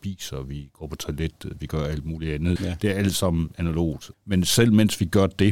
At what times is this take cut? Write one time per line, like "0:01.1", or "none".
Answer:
0:02.6
0:04.1